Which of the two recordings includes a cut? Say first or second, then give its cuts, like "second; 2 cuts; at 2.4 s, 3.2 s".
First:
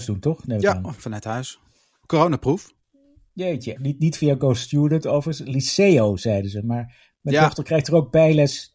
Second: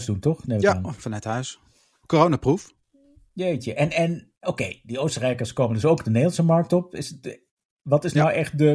first; 1 cut; at 3.8 s